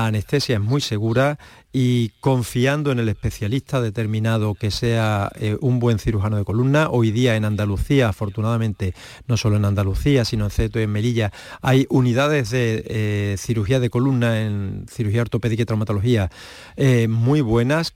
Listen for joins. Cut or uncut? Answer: uncut